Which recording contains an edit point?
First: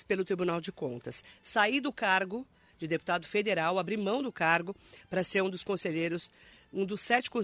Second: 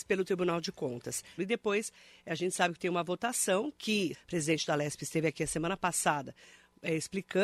second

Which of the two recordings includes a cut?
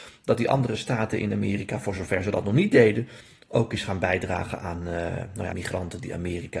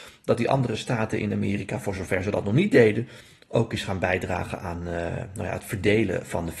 first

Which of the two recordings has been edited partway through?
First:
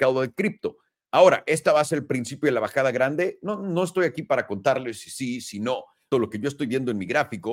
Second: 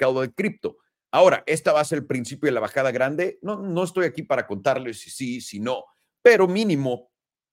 first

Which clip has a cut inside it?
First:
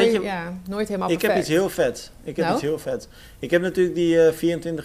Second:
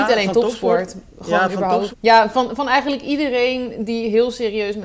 second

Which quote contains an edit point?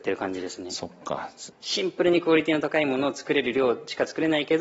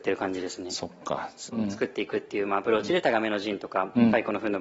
second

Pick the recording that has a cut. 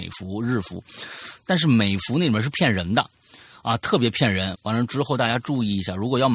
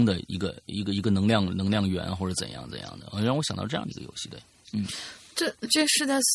first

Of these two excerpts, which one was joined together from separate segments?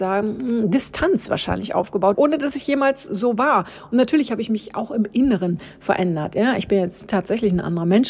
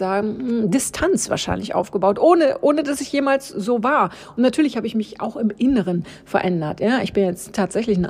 first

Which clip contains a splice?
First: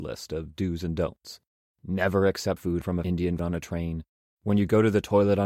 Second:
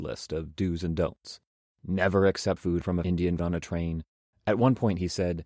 second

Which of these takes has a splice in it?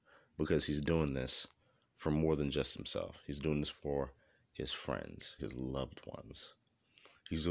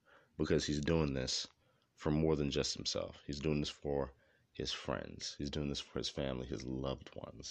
first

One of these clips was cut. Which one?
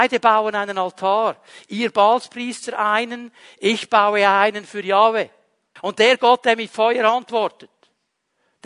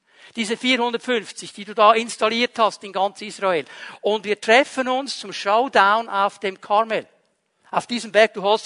first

